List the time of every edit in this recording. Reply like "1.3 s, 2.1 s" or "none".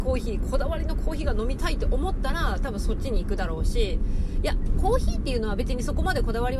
none